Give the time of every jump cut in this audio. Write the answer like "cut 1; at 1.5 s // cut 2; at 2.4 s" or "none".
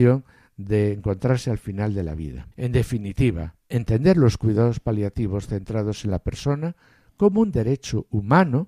cut 1; at 2.5 s // cut 2; at 3.6 s